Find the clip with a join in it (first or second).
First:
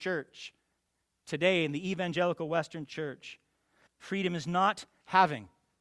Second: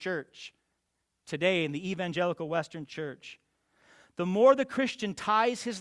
first